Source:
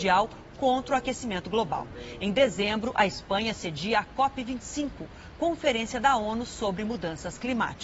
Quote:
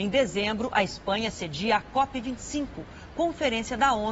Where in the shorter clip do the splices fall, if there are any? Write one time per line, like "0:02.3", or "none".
none